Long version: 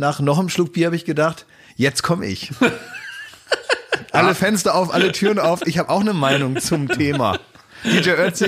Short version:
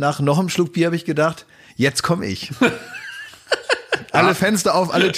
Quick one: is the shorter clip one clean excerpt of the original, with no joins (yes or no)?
yes